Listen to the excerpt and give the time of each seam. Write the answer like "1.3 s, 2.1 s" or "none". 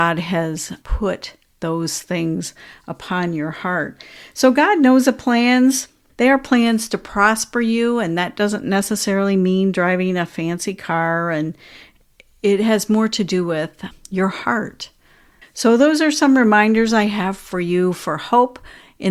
6.1 s, 15.4 s